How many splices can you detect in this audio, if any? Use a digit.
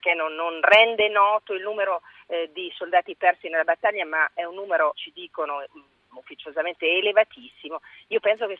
1